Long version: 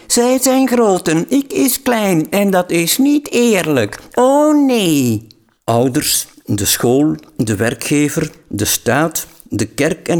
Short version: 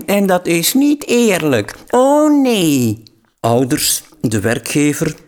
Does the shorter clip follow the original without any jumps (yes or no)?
no